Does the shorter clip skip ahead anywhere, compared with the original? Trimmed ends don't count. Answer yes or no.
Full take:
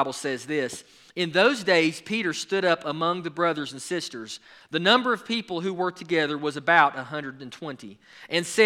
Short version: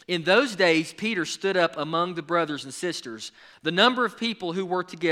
no